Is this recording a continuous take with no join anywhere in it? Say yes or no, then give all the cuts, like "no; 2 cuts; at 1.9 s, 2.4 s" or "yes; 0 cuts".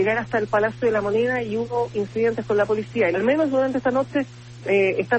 no; 1 cut; at 3.1 s